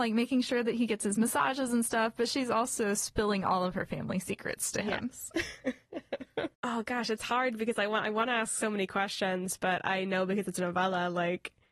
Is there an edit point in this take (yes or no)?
no